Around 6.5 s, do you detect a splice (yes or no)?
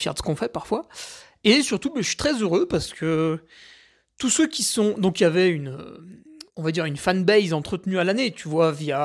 yes